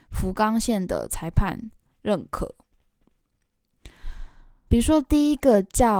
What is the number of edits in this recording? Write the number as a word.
one